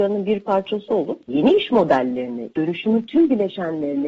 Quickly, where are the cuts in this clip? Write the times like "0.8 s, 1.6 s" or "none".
2.5 s